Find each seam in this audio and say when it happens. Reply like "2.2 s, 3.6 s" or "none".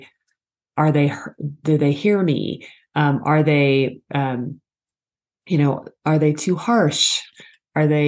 none